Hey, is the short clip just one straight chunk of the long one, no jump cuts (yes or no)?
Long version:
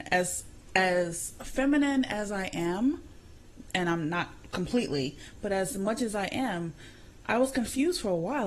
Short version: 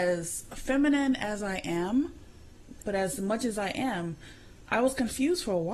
no